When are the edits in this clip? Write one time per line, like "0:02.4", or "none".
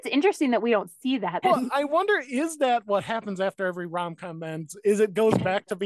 0:01.4